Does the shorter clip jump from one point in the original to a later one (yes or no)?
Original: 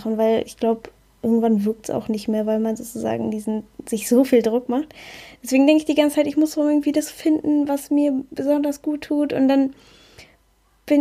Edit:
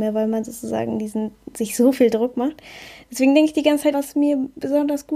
yes